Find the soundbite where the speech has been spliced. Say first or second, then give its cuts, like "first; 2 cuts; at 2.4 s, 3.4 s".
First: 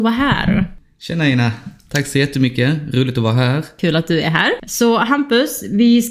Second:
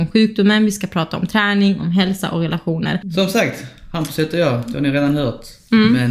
second; 1 cut; at 3.0 s